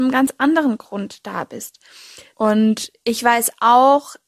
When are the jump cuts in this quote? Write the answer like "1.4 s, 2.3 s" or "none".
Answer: 2.3 s